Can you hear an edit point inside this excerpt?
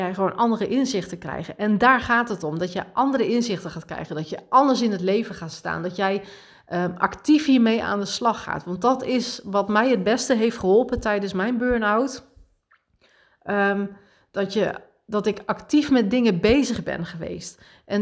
no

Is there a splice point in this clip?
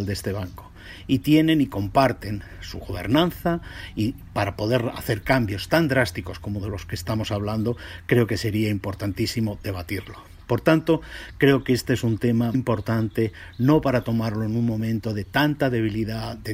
yes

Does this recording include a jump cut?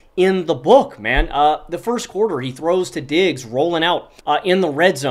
yes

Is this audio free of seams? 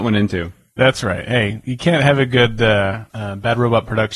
no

